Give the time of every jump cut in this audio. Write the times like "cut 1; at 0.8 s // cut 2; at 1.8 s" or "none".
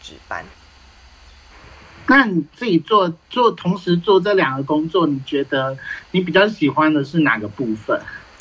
none